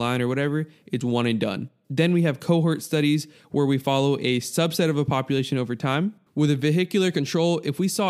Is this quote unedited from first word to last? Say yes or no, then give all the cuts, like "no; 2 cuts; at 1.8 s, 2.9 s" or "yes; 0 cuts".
no; 2 cuts; at 1.0 s, 6.3 s